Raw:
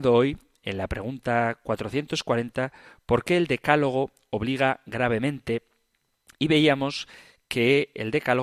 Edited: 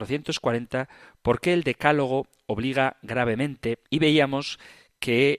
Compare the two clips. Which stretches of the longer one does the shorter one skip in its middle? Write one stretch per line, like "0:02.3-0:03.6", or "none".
0:05.7-0:06.3